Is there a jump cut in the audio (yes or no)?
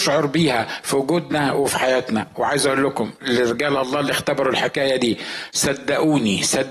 yes